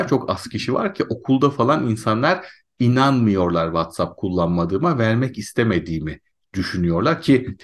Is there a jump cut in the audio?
no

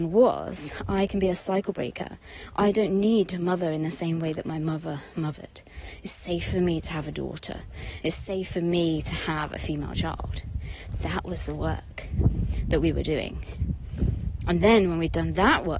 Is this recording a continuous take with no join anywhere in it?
yes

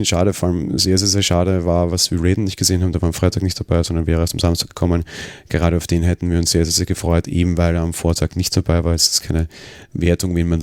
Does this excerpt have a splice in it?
no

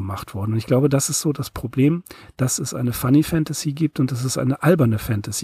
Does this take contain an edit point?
no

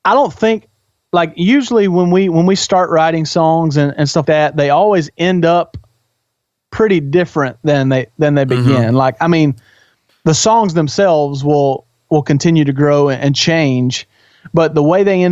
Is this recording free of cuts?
no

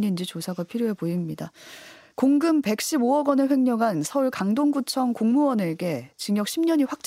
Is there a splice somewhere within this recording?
no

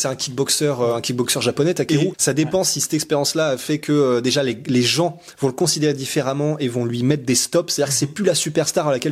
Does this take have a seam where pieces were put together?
yes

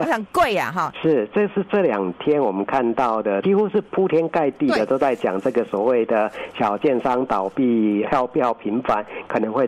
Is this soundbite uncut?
no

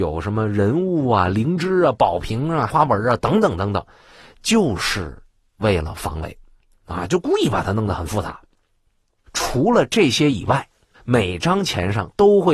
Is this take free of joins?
no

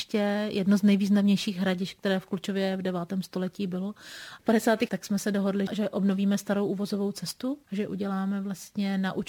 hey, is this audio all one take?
no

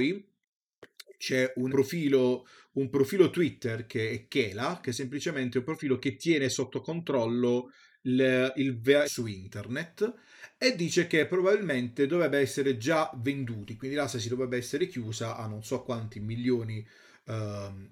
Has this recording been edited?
yes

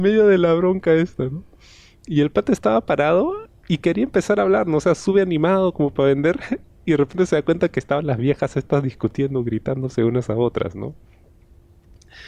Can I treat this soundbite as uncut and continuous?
yes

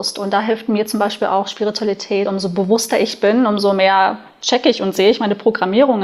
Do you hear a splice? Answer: no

